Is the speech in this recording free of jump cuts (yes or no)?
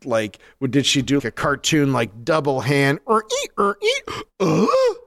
no